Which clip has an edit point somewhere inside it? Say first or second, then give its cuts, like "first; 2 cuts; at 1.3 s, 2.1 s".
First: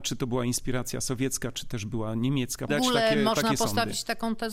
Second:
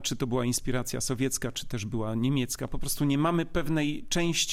first; 1 cut; at 2.7 s